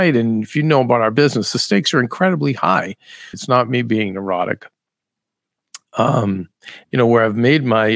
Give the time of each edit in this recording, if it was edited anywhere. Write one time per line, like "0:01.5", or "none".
0:03.3
0:06.8